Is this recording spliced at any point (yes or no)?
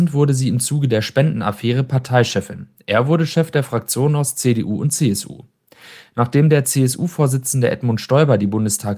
no